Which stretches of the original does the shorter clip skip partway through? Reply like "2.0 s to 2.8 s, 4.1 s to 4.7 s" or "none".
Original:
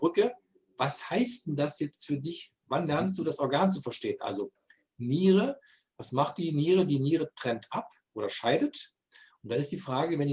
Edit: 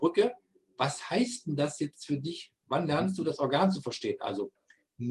none